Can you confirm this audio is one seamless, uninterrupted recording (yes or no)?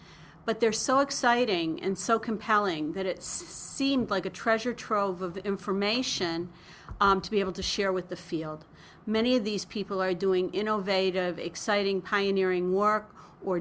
yes